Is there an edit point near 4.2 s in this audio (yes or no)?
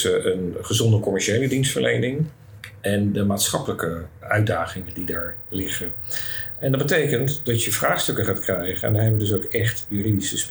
yes